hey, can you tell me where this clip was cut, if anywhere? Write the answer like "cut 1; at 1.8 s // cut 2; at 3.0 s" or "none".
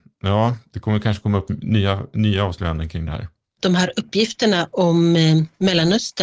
none